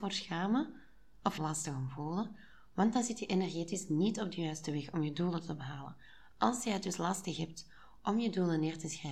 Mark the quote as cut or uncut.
cut